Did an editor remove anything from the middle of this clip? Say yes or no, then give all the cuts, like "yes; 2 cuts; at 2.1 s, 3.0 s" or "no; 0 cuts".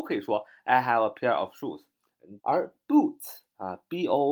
yes; 1 cut; at 2.4 s